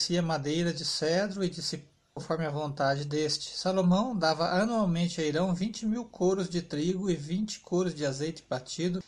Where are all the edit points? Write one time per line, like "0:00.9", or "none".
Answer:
0:02.2